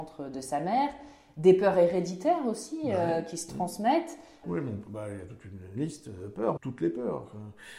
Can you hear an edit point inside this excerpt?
yes; 2 cuts; at 4.4 s, 6.6 s

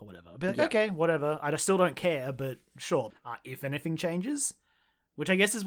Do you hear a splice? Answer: yes; 1 cut; at 3.1 s

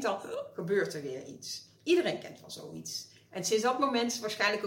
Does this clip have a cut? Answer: yes; 1 cut; at 1.7 s

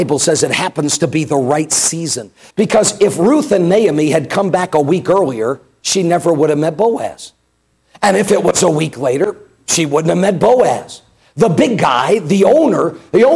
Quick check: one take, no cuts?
no; 1 cut; at 2.5 s

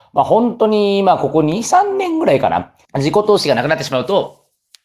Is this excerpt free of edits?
no; 1 cut; at 2.8 s

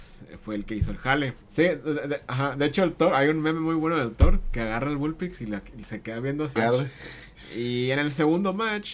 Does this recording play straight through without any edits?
no; 2 cuts; at 1.4 s, 6.6 s

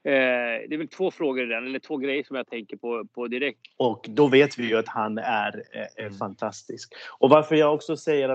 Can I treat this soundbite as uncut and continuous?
no; 1 cut; at 3.6 s

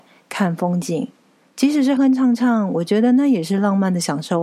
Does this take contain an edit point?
yes; 1 cut; at 2.0 s

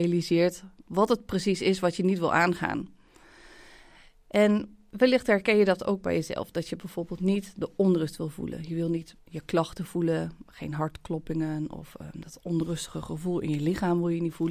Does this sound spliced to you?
yes; 1 cut; at 9.2 s

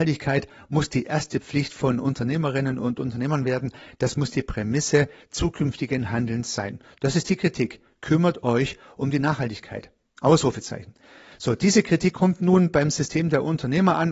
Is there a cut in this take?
no; 0 cuts

